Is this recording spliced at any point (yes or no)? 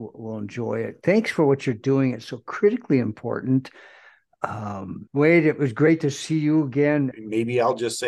yes